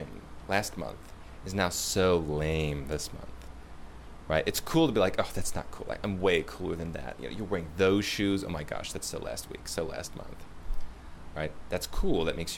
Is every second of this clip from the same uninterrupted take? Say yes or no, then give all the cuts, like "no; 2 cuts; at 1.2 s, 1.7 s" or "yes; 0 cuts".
yes; 0 cuts